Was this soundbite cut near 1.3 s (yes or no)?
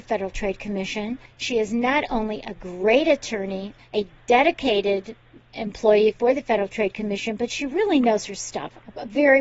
no